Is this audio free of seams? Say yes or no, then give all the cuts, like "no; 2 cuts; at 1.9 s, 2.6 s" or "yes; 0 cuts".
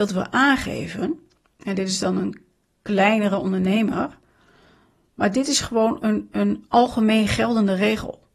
yes; 0 cuts